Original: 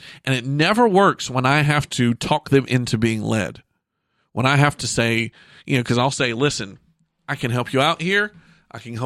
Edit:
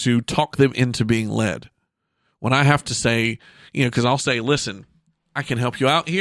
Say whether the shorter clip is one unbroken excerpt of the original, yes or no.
yes